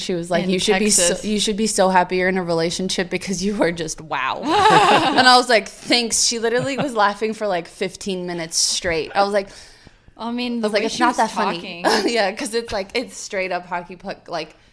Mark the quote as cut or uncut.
uncut